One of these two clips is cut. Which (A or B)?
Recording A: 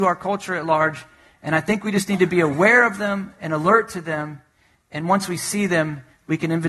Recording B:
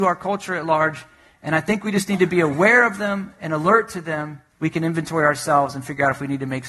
B